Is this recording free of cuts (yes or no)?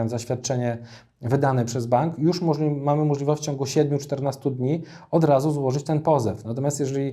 yes